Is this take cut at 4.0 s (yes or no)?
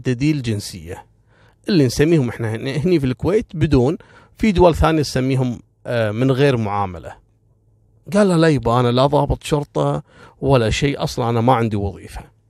no